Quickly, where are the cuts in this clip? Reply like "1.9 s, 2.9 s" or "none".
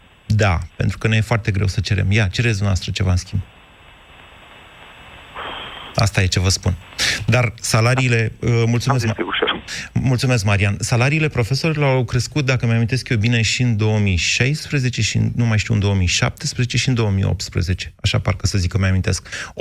5.9 s